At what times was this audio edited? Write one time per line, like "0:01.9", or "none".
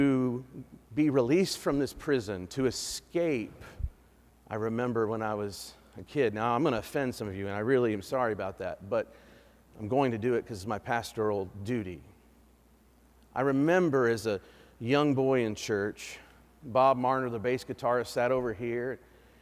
0:04.3